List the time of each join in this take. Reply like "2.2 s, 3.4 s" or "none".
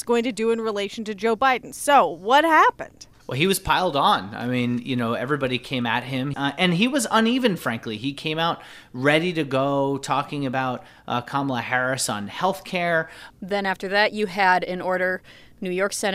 6.3 s, 13.3 s

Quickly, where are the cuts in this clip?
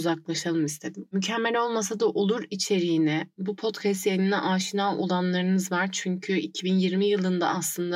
none

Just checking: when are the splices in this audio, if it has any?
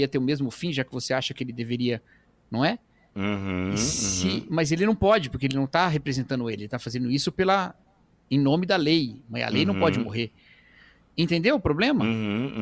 none

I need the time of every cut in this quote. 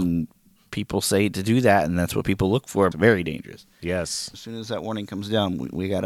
2.9 s, 4.3 s

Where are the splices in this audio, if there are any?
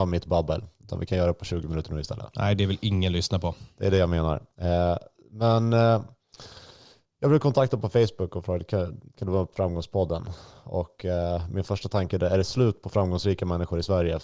4.5 s

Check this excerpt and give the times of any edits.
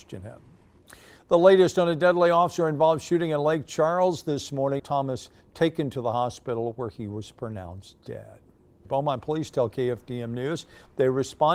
4.8 s, 8.9 s

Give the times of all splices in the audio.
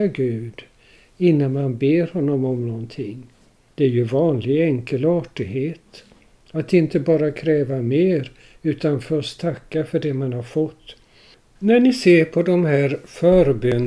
11.4 s

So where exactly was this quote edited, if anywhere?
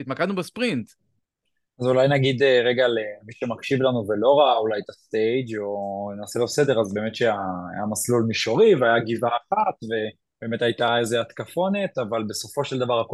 none

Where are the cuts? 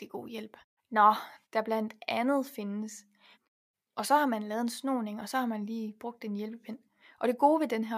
1.4 s, 3.3 s

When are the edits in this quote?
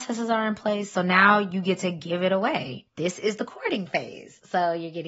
2.9 s

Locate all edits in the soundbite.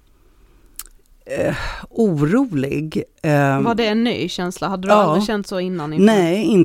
none

